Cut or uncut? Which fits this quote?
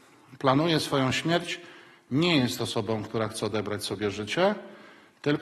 uncut